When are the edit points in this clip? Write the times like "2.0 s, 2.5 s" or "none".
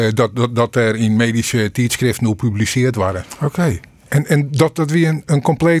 3.2 s